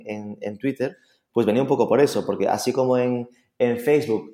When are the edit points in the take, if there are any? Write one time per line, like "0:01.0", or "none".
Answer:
none